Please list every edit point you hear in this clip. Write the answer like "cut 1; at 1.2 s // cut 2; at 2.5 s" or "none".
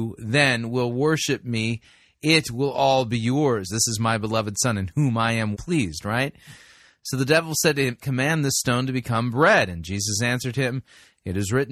cut 1; at 3.7 s // cut 2; at 5.5 s // cut 3; at 8.0 s